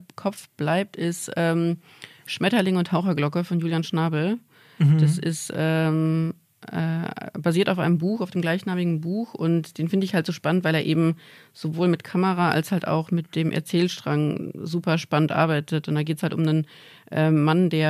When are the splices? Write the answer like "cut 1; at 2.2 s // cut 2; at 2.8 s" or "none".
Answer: none

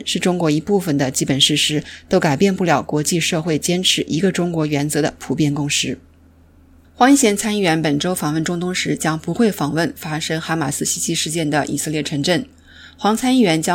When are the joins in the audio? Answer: none

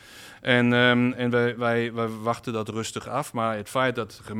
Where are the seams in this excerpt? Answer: none

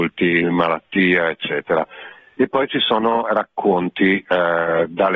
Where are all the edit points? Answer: none

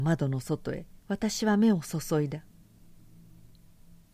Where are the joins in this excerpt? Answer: cut 1; at 1.0 s

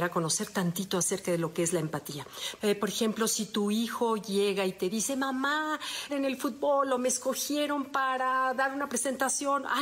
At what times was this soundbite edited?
cut 1; at 2.6 s // cut 2; at 6.1 s

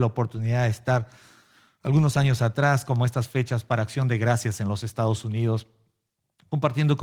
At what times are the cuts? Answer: none

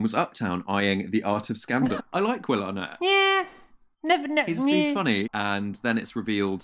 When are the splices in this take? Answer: cut 1; at 2.0 s // cut 2; at 5.2 s

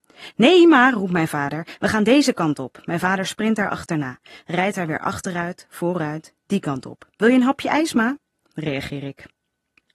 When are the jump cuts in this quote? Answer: cut 1; at 7.1 s // cut 2; at 8.4 s

